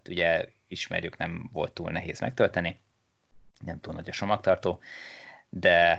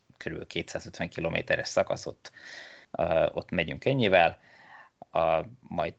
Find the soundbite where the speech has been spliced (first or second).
second